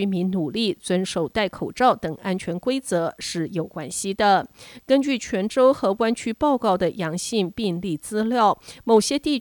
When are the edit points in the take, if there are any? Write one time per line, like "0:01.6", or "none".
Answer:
none